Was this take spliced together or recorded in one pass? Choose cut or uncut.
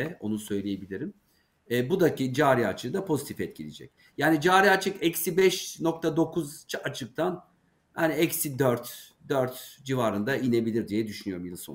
uncut